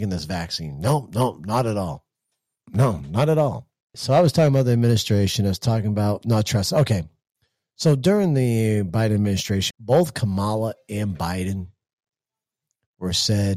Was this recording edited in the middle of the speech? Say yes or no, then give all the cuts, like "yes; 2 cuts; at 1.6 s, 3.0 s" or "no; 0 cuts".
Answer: yes; 3 cuts; at 2.7 s, 3.9 s, 9.7 s